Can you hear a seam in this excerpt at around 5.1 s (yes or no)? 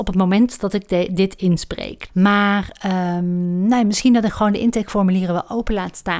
no